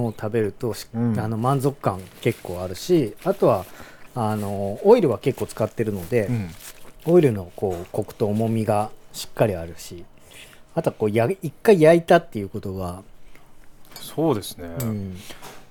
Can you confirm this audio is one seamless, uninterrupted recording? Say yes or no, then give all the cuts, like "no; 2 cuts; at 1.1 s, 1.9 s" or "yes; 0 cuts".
yes; 0 cuts